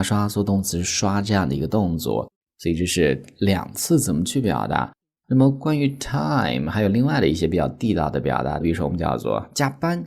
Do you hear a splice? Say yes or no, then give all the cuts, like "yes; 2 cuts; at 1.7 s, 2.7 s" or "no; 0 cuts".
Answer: yes; 1 cut; at 8.6 s